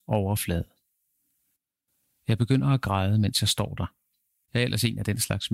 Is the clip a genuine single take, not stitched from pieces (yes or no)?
no